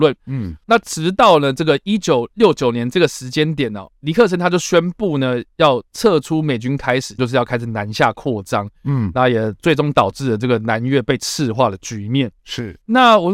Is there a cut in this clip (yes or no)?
yes